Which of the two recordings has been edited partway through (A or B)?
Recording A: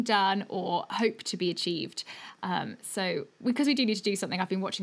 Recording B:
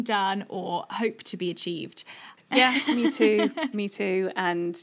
B